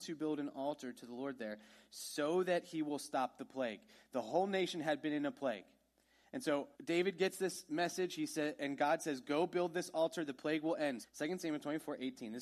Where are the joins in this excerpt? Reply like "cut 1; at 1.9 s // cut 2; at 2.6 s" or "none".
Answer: cut 1; at 6.7 s // cut 2; at 11.0 s